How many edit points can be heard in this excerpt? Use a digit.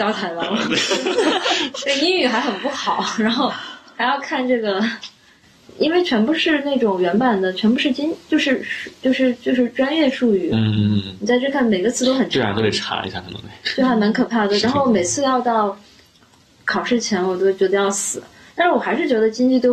0